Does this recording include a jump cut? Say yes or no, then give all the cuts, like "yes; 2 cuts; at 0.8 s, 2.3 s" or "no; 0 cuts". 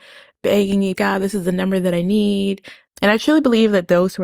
yes; 2 cuts; at 0.9 s, 2.9 s